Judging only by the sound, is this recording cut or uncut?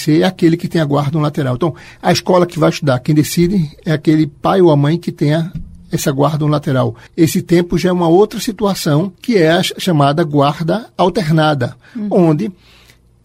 cut